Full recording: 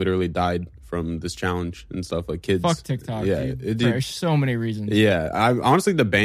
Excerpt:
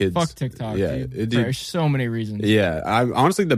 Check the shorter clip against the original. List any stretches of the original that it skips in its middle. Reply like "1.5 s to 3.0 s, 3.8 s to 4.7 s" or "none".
none